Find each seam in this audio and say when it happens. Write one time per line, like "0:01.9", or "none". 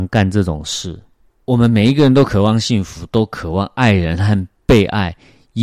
none

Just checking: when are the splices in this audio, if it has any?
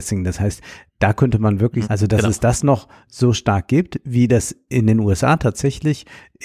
0:01.8

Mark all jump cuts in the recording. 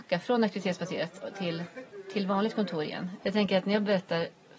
0:03.2

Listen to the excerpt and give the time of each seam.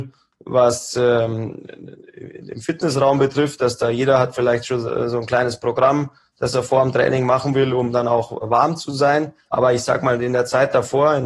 0:09.4

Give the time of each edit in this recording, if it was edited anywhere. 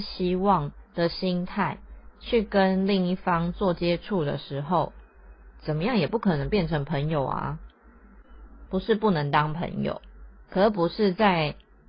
0:08.7

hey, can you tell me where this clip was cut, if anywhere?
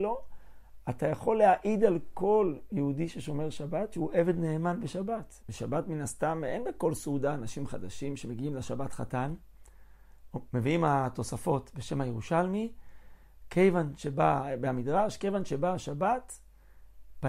0:05.4

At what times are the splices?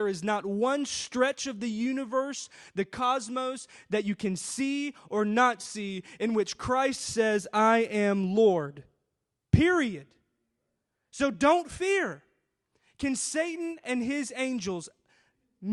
none

